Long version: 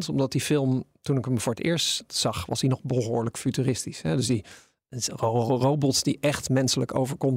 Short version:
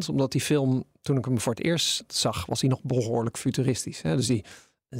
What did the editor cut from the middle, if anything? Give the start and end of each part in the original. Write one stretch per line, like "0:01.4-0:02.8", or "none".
none